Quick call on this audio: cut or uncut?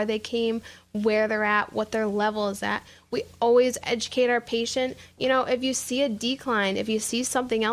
uncut